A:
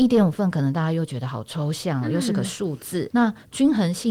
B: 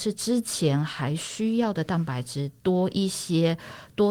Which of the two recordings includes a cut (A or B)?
A